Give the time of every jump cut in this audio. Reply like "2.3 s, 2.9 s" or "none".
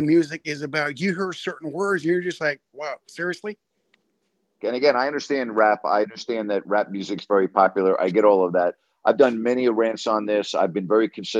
4.6 s